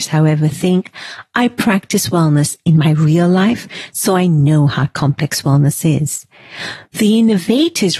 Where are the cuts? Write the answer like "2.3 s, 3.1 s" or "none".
none